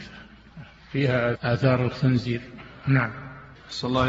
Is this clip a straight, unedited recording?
no; 1 cut; at 1.3 s

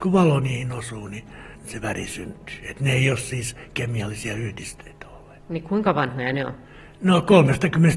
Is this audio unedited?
yes; 0 cuts

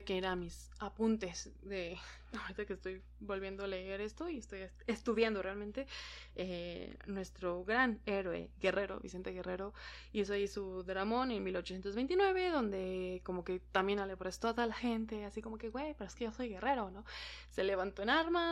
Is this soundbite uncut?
yes; 0 cuts

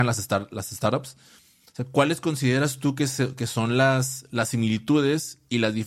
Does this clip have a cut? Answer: no; 0 cuts

